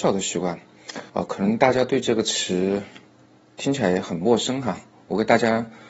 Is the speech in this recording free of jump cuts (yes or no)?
no